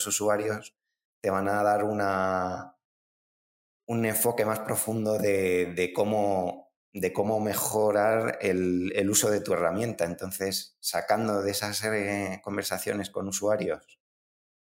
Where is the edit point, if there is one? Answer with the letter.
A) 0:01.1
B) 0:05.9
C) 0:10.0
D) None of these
D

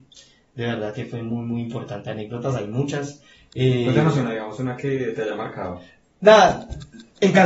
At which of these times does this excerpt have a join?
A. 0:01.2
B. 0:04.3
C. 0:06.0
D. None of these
D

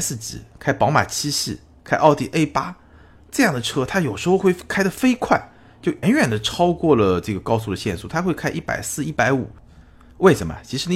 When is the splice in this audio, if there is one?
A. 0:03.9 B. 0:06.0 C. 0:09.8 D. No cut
B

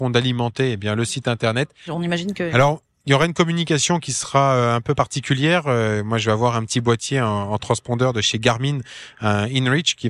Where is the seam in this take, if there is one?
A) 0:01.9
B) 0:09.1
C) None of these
A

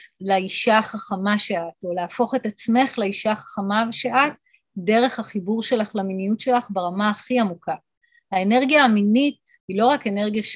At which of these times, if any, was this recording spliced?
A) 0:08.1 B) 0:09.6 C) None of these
B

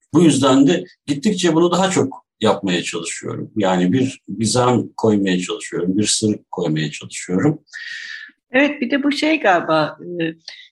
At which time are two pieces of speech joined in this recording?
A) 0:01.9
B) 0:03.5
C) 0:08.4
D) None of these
C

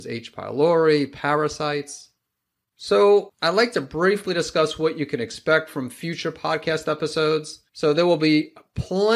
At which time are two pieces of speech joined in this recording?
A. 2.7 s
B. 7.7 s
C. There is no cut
B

